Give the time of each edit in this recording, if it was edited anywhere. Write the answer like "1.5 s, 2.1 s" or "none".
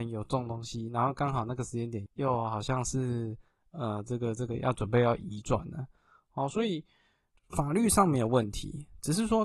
2.1 s